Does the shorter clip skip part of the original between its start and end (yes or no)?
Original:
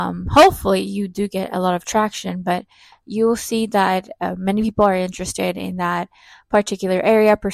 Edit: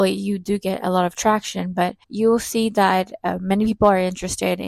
yes